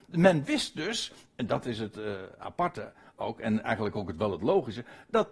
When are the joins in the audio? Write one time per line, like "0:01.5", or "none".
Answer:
none